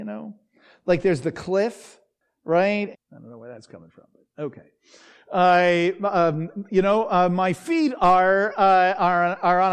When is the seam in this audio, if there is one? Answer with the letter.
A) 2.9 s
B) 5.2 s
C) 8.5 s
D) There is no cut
A